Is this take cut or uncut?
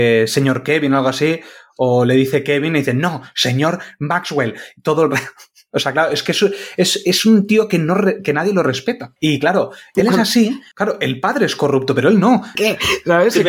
cut